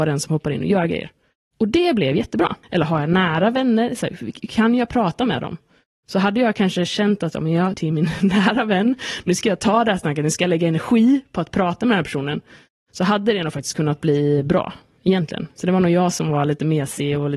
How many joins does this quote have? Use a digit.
2